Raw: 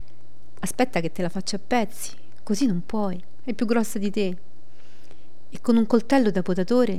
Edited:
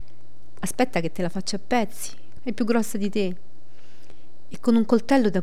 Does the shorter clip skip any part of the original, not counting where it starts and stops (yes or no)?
yes